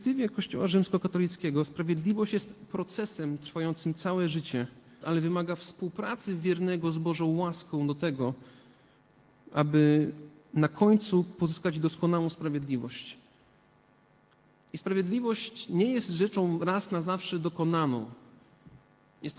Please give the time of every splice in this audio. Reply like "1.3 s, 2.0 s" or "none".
5.0 s

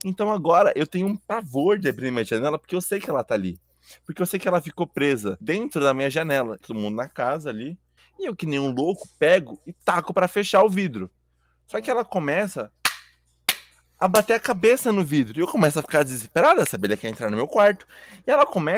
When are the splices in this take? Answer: 6.6 s, 8.0 s

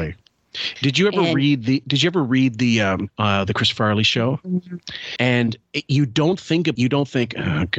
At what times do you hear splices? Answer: 3.1 s, 5.2 s, 6.8 s

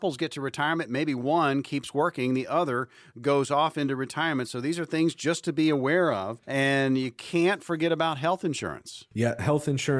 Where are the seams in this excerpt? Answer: 6.4 s

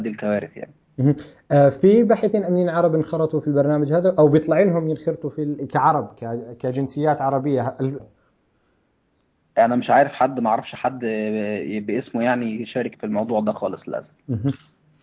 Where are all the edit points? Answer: 8.0 s, 12.9 s

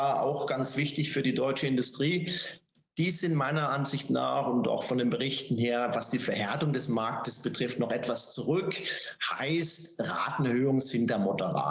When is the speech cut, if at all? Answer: none

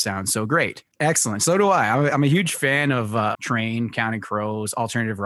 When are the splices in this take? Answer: 0.9 s, 3.3 s

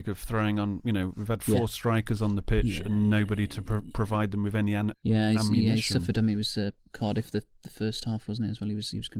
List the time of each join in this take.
none

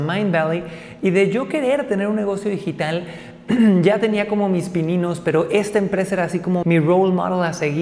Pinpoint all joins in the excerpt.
6.6 s

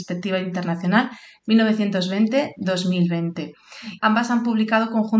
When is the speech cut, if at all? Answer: 4.0 s

